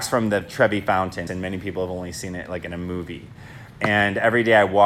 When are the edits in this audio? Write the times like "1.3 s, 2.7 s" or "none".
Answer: 1.3 s